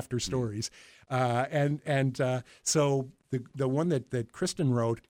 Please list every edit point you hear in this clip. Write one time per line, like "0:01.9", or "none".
none